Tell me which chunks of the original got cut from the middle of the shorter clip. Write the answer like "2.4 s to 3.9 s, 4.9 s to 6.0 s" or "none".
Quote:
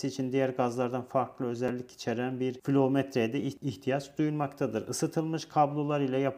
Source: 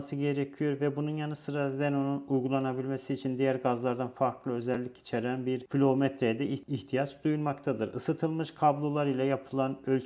none